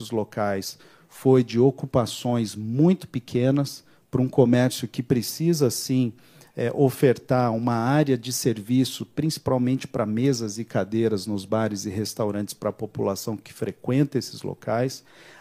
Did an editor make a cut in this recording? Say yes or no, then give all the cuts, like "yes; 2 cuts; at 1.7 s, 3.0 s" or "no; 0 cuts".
no; 0 cuts